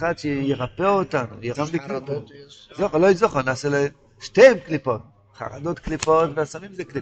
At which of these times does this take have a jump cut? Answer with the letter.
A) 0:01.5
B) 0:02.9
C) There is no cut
A